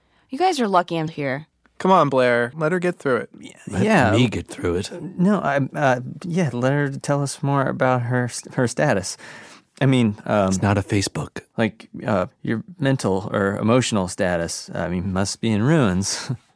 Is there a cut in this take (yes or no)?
yes